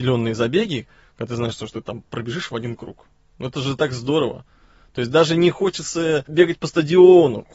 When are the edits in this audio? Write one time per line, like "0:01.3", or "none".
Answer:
none